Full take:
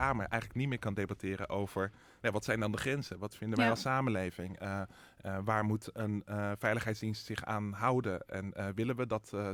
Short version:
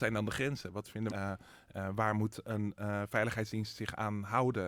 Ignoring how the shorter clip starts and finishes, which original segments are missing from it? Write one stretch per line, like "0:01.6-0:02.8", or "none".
0:03.6-0:04.6